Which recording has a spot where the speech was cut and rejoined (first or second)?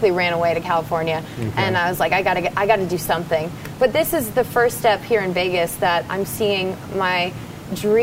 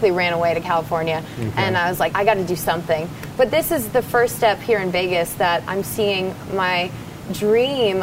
second